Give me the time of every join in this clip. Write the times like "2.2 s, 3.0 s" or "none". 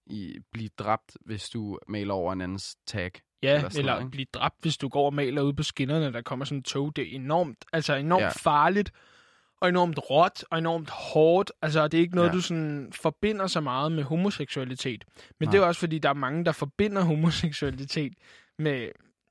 none